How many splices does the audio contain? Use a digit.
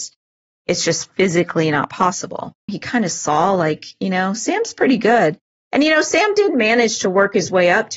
1